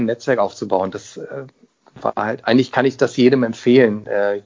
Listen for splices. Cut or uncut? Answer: uncut